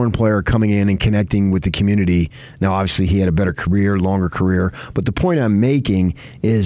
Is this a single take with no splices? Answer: yes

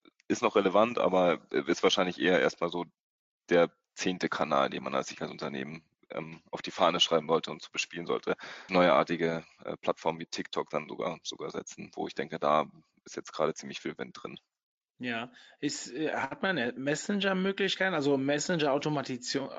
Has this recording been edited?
yes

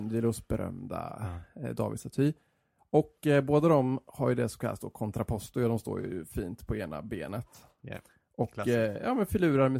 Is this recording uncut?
yes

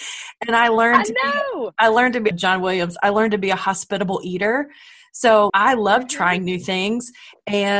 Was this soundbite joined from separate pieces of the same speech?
yes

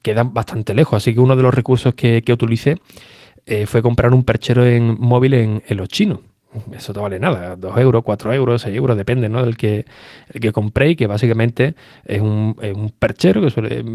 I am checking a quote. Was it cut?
no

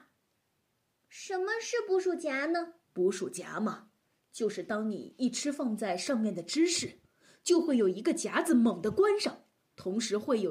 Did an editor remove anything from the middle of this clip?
yes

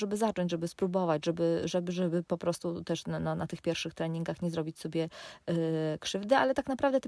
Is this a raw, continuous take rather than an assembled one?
yes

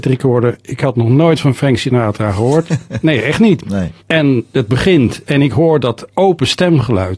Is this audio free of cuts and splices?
no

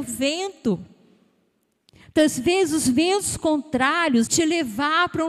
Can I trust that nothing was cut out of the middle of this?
no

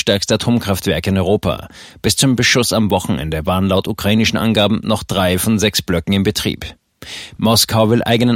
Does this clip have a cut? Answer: yes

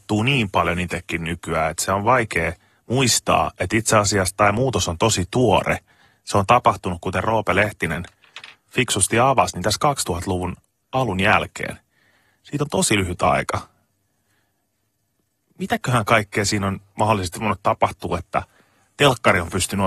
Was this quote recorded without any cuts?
yes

